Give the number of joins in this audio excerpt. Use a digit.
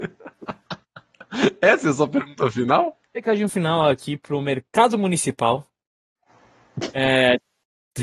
1